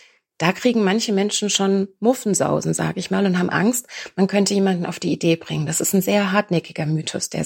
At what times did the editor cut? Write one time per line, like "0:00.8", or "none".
none

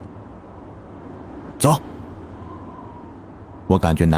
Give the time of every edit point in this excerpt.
0:01.5

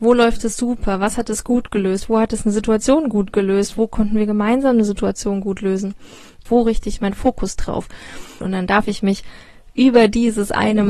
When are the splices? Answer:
0:06.5
0:08.4

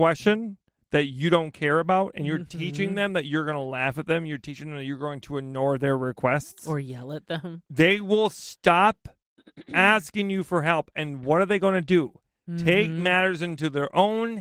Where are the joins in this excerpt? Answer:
none

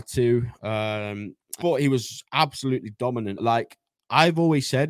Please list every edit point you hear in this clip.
0:01.6
0:03.4

